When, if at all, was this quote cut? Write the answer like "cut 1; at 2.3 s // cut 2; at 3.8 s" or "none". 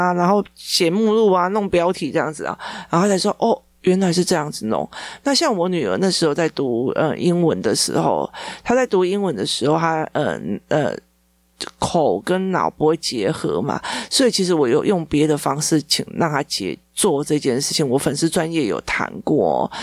none